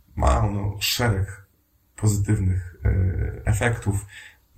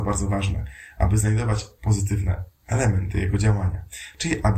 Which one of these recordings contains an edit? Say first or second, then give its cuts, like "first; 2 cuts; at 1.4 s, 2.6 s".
second; 1 cut; at 2.5 s